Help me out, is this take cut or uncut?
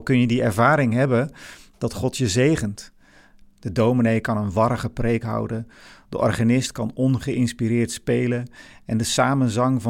cut